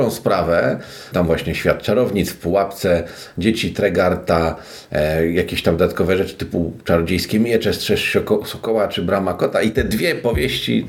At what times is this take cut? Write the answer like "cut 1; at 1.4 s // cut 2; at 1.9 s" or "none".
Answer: cut 1; at 1.1 s